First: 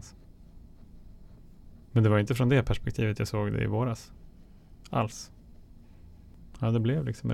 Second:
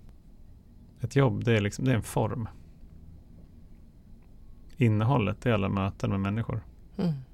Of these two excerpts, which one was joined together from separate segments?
second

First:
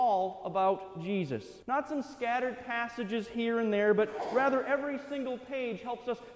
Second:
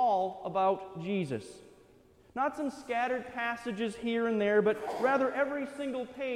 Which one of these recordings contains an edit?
first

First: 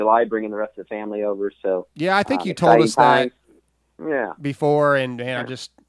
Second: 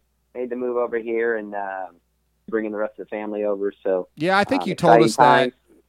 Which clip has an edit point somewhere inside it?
second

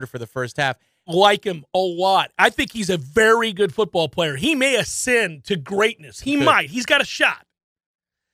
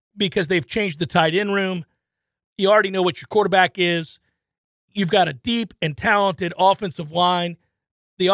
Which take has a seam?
first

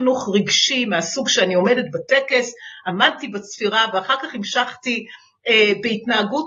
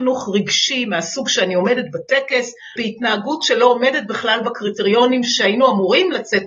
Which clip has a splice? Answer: second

